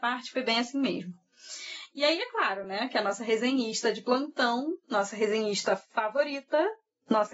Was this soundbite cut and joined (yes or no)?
no